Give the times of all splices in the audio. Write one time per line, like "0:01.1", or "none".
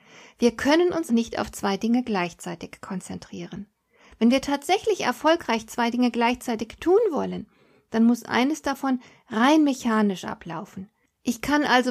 0:01.1